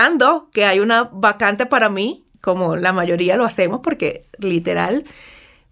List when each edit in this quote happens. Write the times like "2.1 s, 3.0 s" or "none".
2.3 s